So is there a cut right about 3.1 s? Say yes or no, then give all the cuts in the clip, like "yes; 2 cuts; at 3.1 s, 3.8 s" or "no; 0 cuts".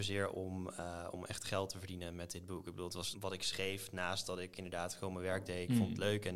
yes; 1 cut; at 3.1 s